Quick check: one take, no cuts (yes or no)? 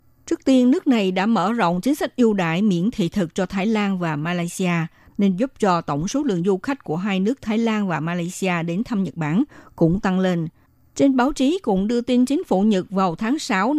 yes